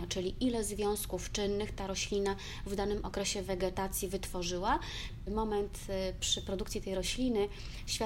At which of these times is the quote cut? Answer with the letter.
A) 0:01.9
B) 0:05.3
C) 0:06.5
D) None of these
B